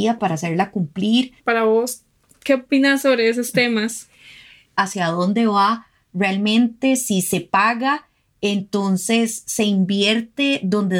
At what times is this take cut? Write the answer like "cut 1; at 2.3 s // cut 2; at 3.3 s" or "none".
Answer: cut 1; at 1.4 s // cut 2; at 4.7 s